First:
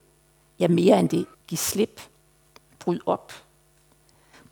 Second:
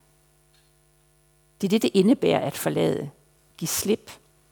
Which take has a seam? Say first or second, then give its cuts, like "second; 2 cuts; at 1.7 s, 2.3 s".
first; 1 cut; at 1.3 s